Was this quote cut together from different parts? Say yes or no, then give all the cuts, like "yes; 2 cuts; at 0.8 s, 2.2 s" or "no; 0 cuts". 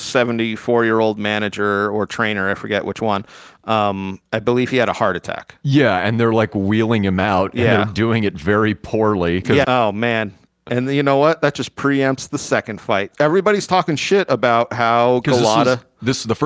yes; 2 cuts; at 9.6 s, 13.1 s